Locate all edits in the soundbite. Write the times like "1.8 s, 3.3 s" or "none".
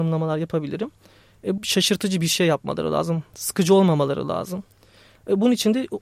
1.6 s